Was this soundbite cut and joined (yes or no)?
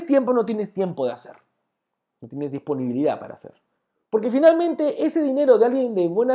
yes